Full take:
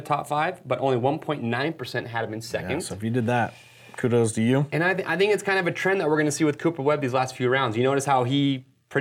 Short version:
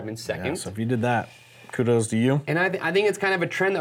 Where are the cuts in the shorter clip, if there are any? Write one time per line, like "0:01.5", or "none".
none

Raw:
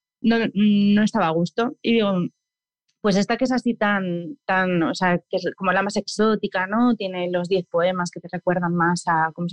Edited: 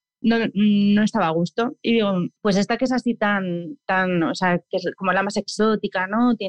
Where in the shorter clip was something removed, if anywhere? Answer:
0:02.4

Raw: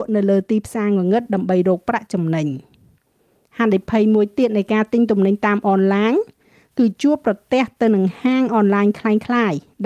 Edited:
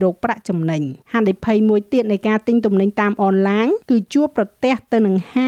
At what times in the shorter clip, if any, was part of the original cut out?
0:01.0
0:03.8

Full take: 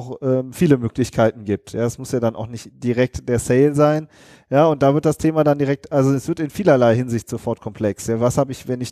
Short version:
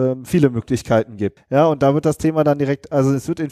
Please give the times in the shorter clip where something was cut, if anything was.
0:01.4

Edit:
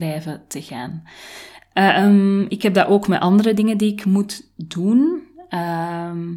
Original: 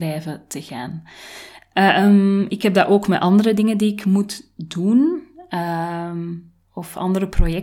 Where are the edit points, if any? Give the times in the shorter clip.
none

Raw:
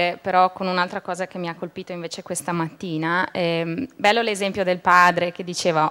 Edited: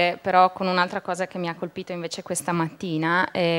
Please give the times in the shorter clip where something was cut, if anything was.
none

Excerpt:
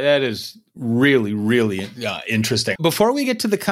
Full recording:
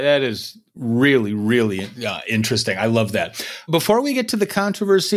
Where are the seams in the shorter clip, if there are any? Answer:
0:02.8

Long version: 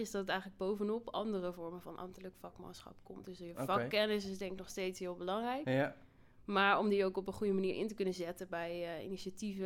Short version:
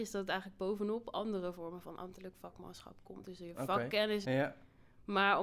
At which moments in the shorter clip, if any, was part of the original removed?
0:04.2

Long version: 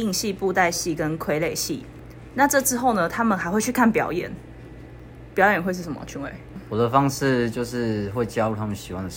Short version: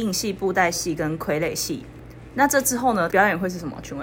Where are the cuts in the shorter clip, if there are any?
0:03.1

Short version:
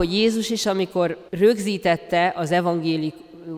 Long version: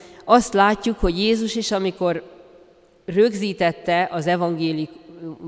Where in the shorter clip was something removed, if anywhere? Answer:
0:01.3

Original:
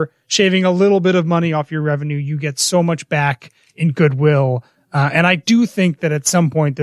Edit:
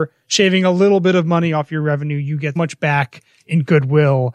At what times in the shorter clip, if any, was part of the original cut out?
0:02.6

